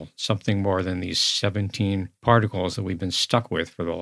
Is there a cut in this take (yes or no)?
yes